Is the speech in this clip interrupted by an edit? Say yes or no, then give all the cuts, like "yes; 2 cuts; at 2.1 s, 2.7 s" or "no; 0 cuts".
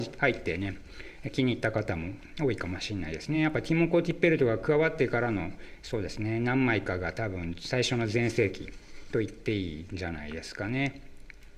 no; 0 cuts